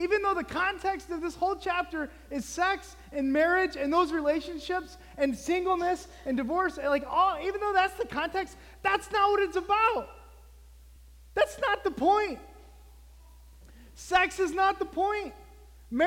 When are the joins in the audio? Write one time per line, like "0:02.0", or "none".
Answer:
none